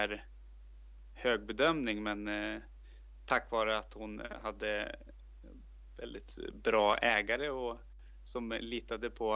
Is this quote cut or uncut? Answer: uncut